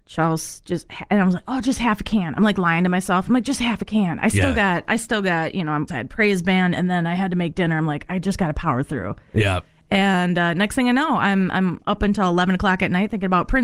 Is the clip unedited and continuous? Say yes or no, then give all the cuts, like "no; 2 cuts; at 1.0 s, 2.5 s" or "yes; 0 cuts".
no; 1 cut; at 5.9 s